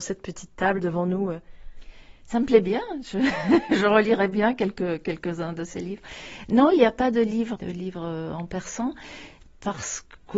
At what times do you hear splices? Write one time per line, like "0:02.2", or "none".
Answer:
0:07.6